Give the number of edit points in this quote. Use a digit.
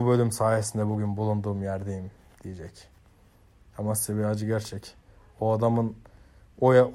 0